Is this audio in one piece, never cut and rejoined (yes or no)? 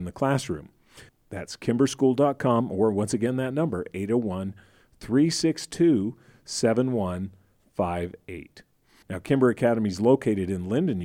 no